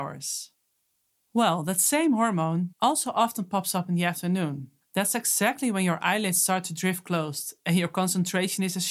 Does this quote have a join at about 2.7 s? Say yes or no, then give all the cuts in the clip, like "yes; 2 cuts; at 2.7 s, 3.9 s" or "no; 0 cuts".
yes; 2 cuts; at 2.7 s, 4.8 s